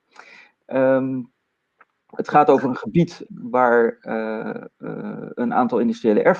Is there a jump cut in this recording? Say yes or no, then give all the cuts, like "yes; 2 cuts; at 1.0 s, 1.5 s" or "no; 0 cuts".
yes; 1 cut; at 3.2 s